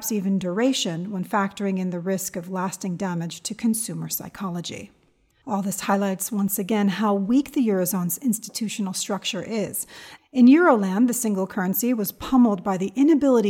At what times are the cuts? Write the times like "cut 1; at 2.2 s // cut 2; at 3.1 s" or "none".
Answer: cut 1; at 5.4 s // cut 2; at 10.2 s